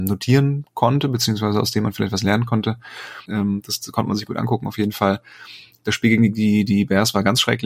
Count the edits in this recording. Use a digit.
1